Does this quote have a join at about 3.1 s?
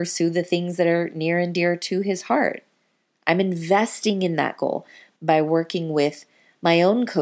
no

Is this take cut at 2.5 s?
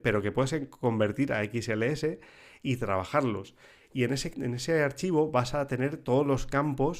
no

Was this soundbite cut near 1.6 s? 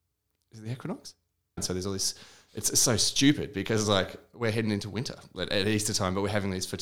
yes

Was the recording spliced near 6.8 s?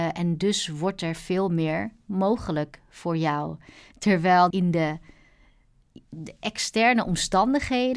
no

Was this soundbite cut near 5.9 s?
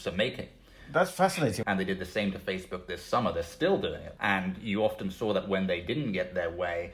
no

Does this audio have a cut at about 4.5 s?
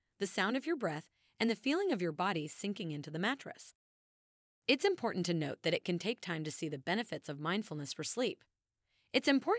no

